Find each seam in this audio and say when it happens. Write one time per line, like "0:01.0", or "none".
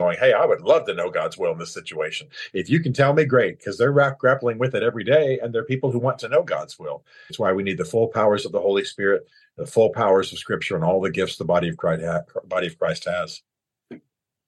0:07.3